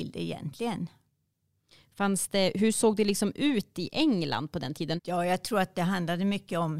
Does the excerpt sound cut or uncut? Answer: cut